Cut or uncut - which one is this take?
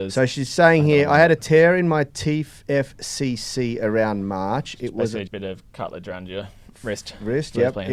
cut